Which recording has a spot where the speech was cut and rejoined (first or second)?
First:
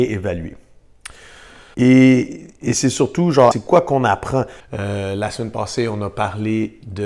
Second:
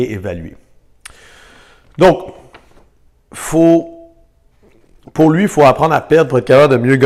first